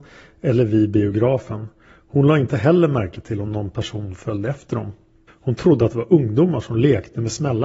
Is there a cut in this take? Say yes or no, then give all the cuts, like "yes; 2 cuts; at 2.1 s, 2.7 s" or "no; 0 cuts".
yes; 1 cut; at 5.3 s